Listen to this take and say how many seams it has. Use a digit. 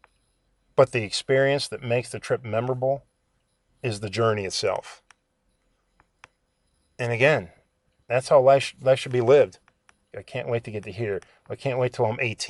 1